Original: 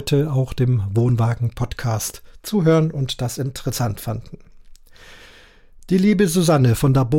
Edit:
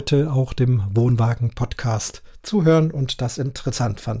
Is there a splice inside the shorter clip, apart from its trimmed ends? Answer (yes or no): no